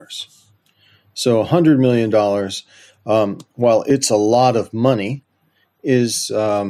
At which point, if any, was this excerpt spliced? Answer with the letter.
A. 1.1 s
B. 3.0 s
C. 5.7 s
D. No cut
D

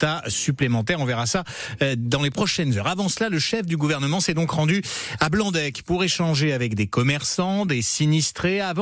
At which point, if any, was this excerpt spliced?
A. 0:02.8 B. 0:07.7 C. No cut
C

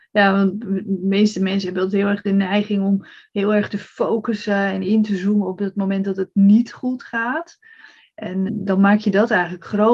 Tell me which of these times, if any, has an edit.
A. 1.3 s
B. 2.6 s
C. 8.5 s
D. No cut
C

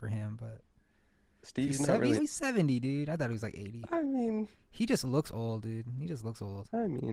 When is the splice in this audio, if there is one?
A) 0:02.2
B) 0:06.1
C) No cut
A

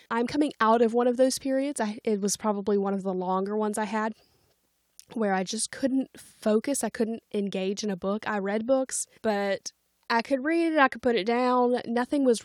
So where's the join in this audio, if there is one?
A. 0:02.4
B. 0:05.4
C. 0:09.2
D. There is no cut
C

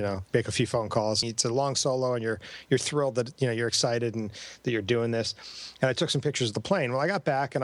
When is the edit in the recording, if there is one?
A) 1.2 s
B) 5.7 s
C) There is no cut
A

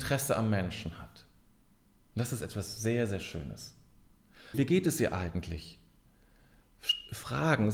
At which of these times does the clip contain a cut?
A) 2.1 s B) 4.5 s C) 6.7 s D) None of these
B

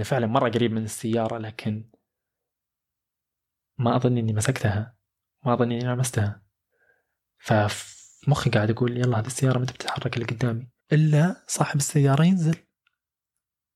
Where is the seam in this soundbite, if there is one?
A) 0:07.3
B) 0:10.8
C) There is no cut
B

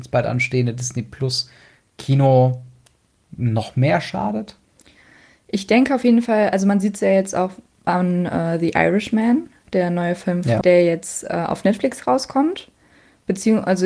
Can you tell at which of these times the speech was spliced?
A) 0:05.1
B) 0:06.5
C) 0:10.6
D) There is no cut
C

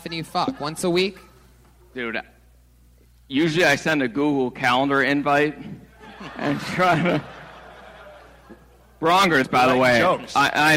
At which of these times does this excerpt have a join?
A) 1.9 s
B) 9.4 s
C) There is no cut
B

